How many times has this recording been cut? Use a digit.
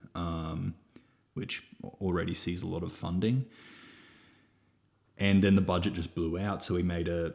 1